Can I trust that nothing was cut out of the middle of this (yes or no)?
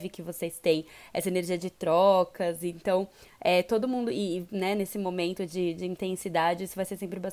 yes